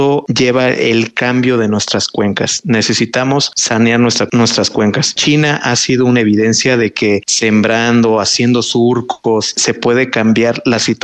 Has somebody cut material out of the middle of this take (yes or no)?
no